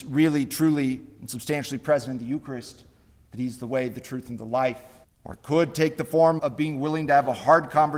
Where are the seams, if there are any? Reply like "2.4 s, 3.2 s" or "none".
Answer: 5.0 s, 6.4 s

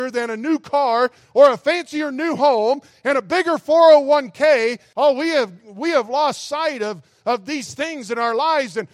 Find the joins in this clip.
4.9 s

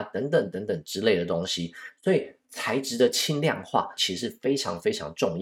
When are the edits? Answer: 4.0 s

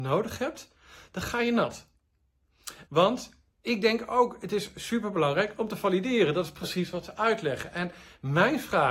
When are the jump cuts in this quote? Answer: 2.9 s

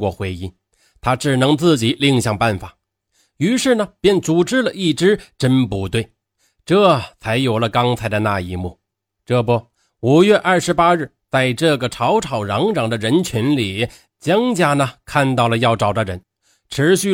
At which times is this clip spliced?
none

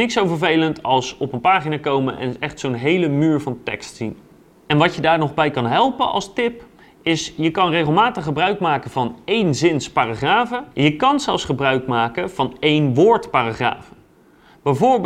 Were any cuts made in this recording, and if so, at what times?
10.7 s

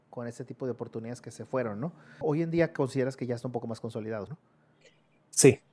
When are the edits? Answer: 2.2 s, 4.3 s

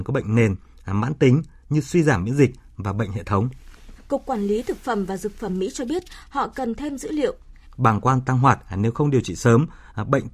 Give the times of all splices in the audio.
4.0 s, 7.6 s

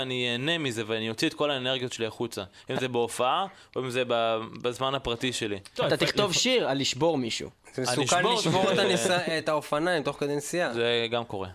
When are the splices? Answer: none

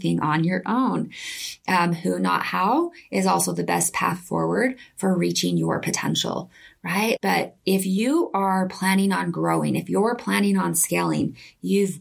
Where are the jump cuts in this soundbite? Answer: 7.2 s

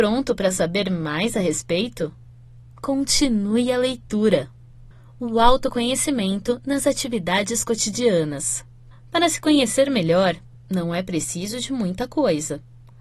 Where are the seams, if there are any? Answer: none

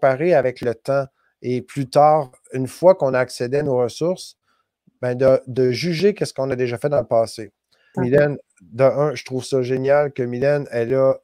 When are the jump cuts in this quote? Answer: 7.9 s

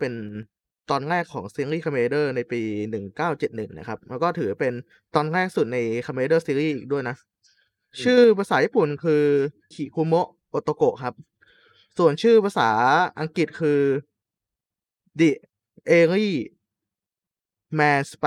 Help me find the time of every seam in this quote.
9.7 s

